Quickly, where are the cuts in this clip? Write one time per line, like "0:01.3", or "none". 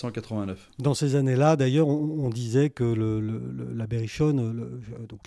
none